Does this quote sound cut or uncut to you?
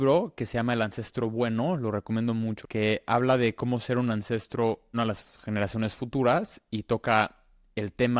cut